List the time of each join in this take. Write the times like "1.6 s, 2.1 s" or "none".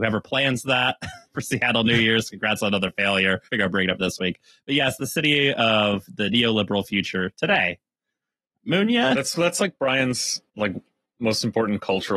3.5 s, 8.6 s, 10.5 s

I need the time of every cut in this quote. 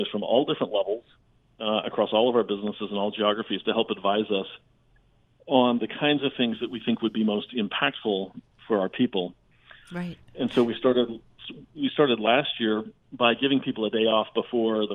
9.8 s

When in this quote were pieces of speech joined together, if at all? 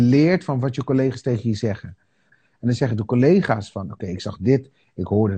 2.3 s

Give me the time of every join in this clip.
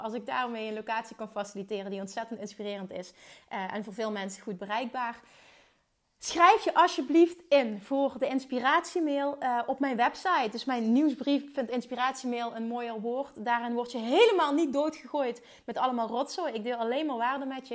none

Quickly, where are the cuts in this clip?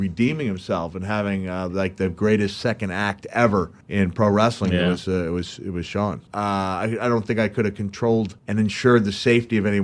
3.8 s, 6.3 s, 8.4 s

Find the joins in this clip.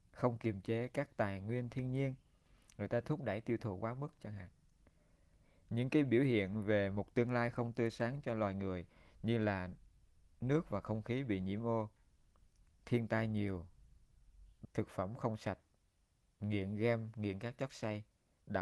14.6 s

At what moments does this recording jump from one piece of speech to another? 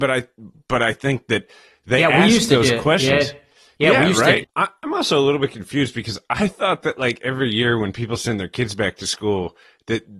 4.4 s

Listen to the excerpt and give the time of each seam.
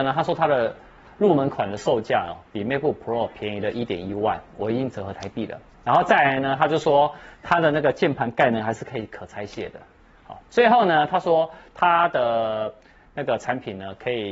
none

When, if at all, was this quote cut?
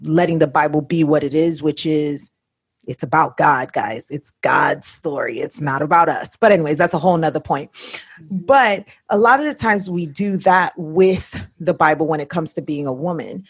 none

